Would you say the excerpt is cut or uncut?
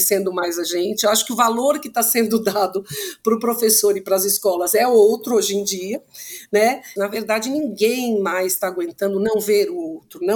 cut